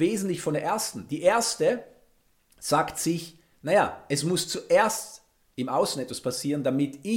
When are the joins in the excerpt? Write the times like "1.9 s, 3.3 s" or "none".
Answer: none